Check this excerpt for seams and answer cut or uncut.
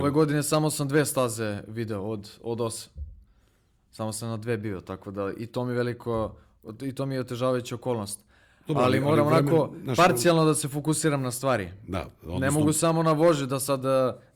uncut